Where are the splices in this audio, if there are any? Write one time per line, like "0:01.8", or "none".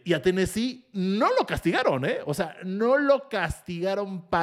none